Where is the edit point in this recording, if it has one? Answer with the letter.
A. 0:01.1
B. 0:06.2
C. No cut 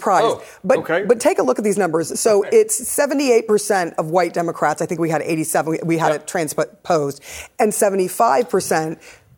C